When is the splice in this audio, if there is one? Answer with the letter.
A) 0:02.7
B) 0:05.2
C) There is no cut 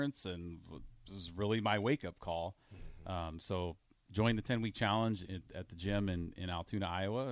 B